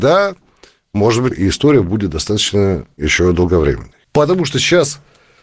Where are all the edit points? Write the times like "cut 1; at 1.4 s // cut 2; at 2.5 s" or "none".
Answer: cut 1; at 1.3 s // cut 2; at 4.0 s